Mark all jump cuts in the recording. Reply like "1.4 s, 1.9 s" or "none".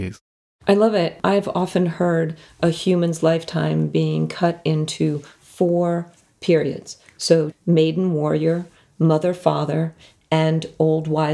7.5 s